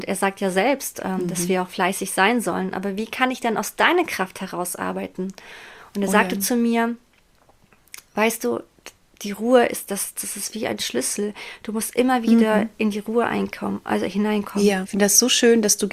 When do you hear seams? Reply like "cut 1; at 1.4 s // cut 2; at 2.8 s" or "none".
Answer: cut 1; at 10.2 s // cut 2; at 14.8 s